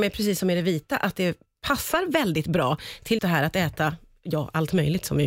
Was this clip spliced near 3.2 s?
yes; 1 cut; at 3.2 s

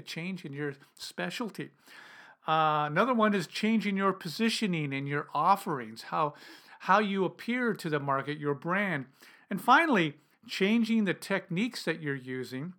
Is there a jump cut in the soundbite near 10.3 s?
yes; 1 cut; at 10.3 s

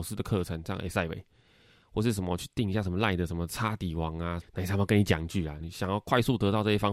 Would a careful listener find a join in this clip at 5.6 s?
yes; 2 cuts; at 4.4 s, 5.6 s

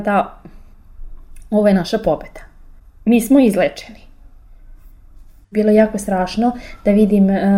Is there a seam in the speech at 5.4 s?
yes; 1 cut; at 5.4 s

